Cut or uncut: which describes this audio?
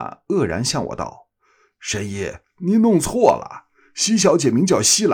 uncut